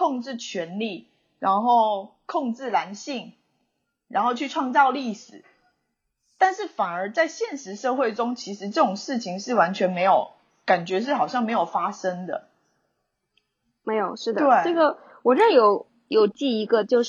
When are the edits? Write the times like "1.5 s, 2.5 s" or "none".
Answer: none